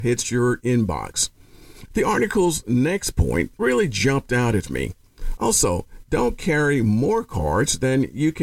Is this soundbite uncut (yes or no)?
no